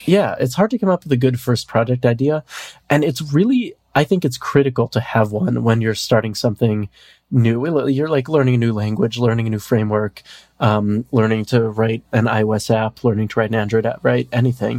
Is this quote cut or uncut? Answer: uncut